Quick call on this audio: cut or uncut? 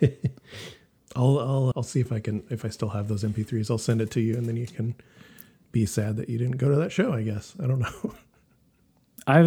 cut